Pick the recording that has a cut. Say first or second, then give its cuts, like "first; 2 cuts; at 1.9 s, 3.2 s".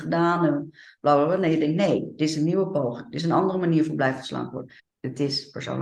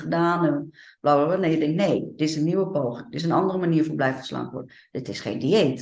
first; 1 cut; at 4.8 s